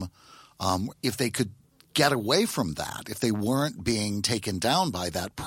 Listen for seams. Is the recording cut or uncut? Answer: cut